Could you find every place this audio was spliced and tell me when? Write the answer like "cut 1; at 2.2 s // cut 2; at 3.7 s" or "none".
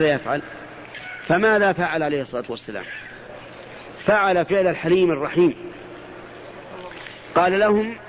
none